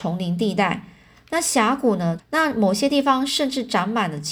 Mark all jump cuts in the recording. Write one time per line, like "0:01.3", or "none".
0:02.2